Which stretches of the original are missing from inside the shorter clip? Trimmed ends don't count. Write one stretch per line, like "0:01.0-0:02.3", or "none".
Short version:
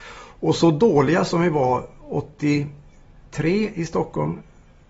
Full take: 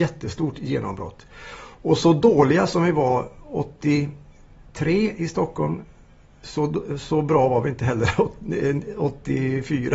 none

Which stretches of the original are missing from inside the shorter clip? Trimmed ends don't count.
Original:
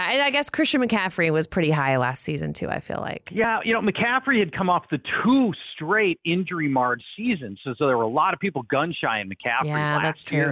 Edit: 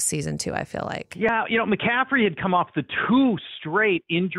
none

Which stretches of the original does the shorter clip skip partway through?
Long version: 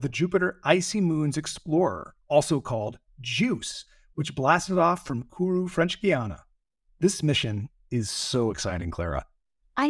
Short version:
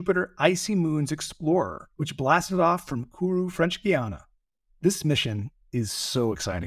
0:02.2-0:04.1

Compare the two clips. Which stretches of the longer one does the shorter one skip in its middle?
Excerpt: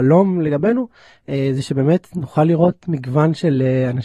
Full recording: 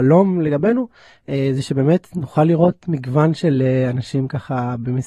none

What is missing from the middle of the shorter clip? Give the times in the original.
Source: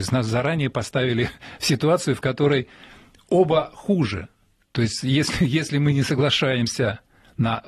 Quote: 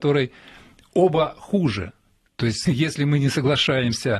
0:05.0-0:05.4

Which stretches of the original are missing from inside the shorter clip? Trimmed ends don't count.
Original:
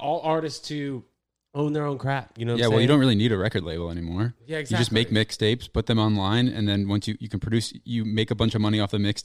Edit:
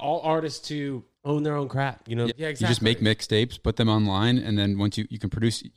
0:01.1-0:01.4
0:02.6-0:04.4

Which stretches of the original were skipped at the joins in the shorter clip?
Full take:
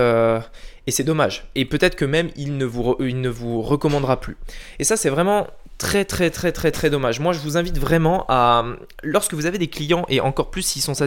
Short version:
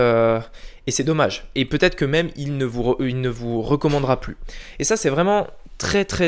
none

